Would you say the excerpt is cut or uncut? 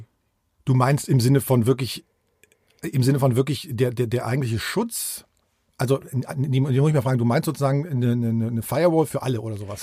uncut